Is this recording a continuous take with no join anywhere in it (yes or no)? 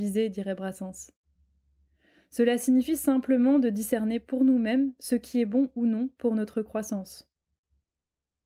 yes